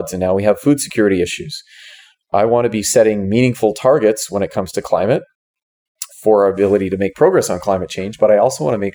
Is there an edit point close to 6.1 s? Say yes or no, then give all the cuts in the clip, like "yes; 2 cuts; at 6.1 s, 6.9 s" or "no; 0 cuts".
yes; 1 cut; at 6.1 s